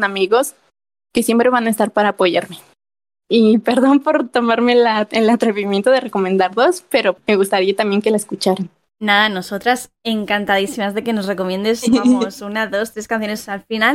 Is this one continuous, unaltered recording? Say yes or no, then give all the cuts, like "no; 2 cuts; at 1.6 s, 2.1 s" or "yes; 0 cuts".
yes; 0 cuts